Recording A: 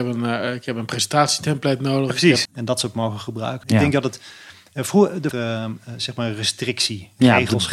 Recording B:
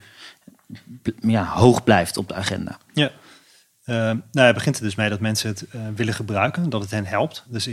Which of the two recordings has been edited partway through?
A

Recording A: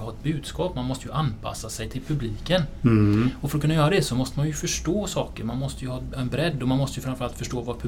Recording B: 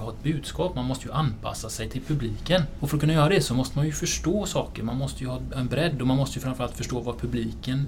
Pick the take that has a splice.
B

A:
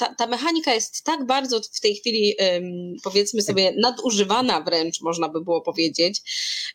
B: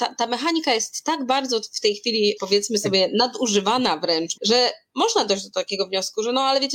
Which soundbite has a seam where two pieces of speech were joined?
B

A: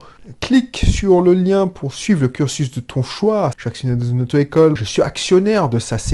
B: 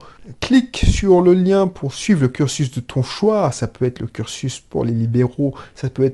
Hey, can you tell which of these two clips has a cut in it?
A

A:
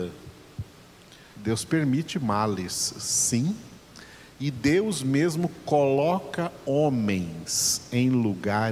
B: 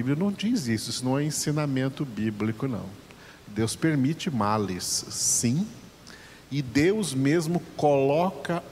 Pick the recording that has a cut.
A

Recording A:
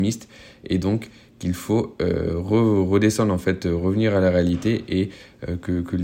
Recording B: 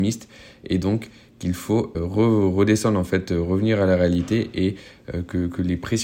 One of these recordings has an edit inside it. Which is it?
B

